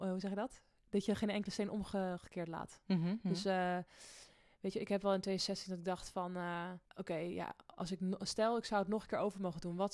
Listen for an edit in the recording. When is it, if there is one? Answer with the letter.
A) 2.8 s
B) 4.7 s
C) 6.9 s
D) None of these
C